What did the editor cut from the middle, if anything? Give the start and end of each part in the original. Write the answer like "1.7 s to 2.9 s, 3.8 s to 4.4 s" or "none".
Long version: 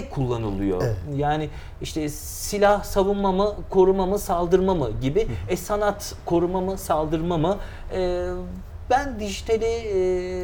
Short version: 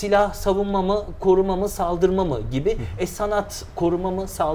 none